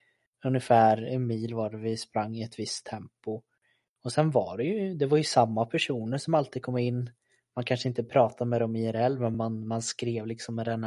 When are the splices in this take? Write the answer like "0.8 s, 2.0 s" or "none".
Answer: none